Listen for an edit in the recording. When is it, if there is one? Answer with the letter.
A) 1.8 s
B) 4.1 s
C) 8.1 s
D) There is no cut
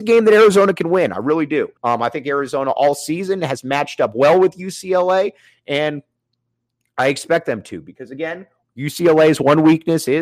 A